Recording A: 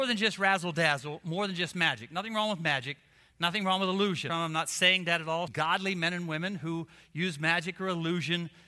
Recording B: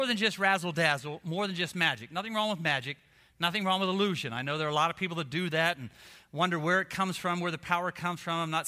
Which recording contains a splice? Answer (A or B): A